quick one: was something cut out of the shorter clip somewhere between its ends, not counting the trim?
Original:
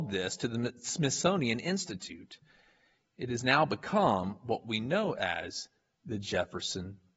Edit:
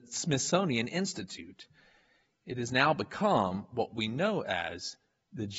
no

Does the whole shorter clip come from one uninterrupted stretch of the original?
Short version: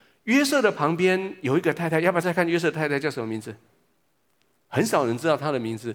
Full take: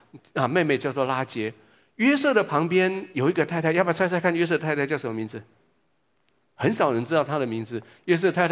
no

